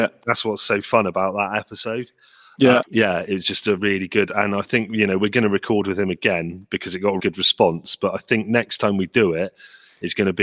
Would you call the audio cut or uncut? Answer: cut